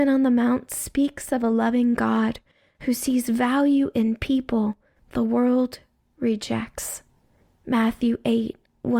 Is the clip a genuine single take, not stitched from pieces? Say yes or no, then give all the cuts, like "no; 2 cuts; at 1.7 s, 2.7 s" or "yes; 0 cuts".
yes; 0 cuts